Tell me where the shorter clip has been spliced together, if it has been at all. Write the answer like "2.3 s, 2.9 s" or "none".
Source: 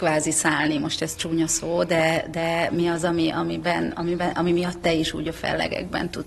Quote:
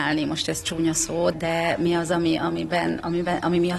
1.3 s